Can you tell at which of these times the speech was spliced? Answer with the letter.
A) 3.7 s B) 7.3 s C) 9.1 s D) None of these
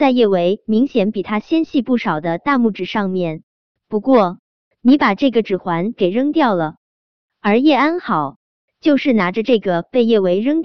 D